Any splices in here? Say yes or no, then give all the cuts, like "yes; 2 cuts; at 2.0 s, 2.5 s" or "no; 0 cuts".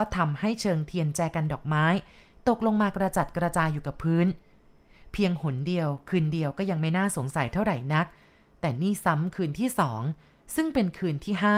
no; 0 cuts